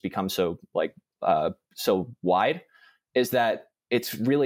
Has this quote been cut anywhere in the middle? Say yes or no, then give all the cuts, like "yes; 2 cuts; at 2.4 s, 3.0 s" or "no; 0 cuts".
no; 0 cuts